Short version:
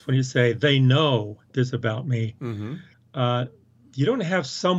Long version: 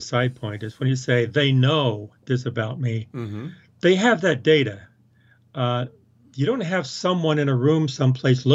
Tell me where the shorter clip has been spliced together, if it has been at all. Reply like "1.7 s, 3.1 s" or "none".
2.9 s

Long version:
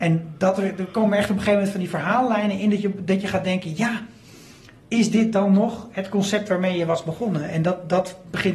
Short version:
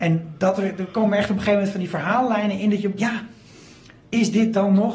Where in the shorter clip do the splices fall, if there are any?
3.0 s

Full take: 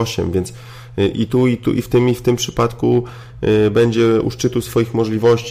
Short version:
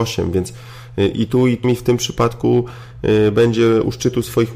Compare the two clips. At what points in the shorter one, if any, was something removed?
1.6 s

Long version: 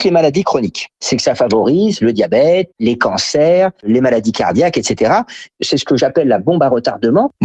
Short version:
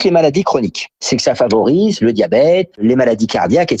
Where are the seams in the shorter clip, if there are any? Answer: 2.7 s

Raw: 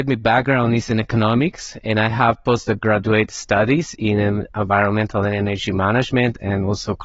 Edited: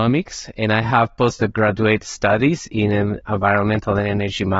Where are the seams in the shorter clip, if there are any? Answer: none

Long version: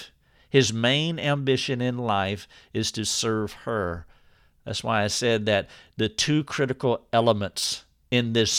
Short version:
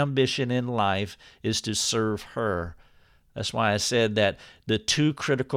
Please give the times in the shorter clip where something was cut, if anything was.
none

